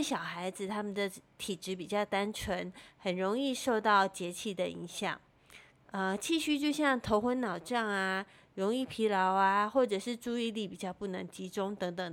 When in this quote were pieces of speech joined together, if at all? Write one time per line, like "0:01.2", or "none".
0:05.8